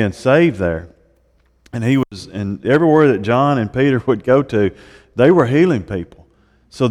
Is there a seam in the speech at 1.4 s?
no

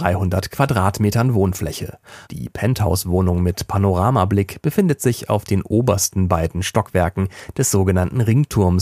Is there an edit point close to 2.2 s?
yes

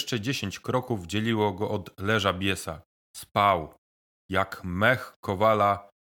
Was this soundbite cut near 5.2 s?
no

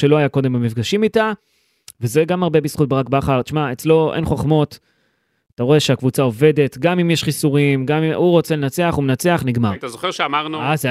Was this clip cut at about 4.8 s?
no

